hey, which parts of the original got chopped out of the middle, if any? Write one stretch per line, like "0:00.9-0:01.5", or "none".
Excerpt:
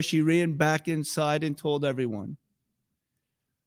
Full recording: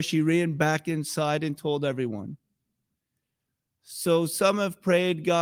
none